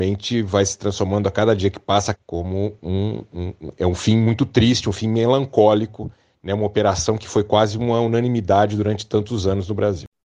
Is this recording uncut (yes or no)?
no